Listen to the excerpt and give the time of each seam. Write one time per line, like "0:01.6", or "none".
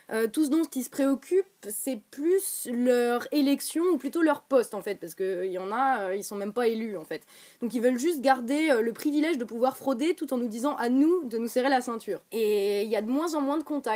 0:12.3